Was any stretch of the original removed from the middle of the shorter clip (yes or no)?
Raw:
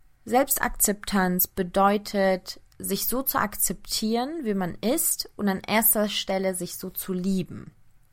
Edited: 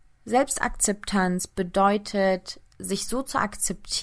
no